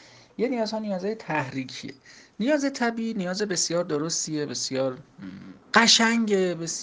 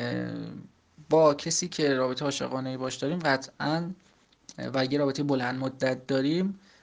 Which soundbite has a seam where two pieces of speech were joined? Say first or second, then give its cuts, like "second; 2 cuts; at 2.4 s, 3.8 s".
first; 1 cut; at 5.6 s